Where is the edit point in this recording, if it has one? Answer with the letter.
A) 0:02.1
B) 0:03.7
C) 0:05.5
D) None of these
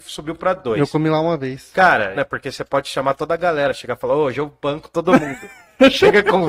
A